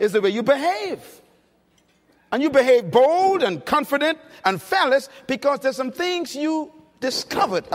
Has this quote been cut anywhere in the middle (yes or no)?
no